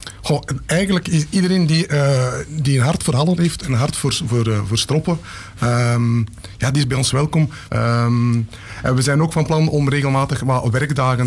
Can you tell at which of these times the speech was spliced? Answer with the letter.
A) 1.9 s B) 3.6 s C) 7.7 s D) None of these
C